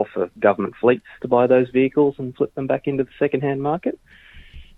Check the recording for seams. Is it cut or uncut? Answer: cut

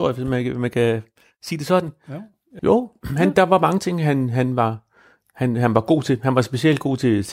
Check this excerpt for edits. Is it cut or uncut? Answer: cut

